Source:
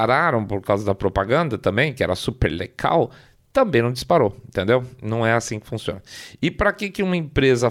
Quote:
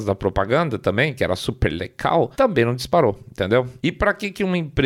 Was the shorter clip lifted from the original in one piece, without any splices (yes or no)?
no